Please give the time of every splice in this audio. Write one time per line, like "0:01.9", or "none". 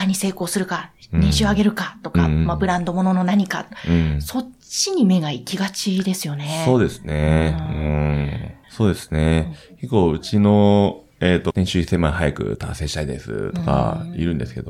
0:08.6
0:11.5